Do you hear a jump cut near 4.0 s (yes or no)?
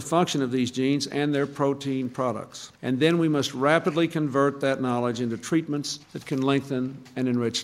no